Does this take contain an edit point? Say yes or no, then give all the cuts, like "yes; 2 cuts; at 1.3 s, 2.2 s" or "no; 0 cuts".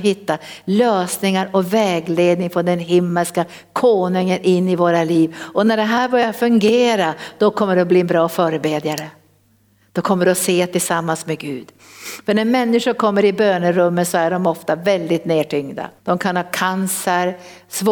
yes; 1 cut; at 16.0 s